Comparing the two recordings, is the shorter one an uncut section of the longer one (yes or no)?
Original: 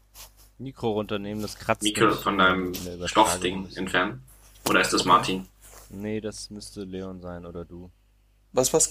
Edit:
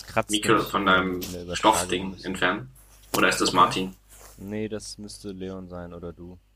yes